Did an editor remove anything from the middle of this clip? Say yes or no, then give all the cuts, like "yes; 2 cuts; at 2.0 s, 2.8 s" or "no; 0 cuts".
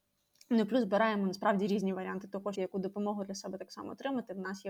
yes; 1 cut; at 2.5 s